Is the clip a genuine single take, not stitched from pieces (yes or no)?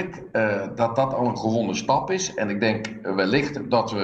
yes